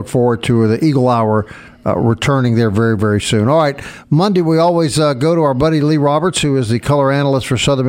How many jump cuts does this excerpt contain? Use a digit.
0